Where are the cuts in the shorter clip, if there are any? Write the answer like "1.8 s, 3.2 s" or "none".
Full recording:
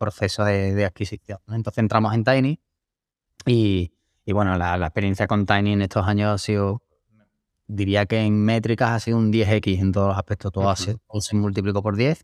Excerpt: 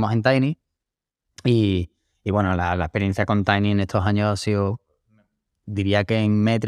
none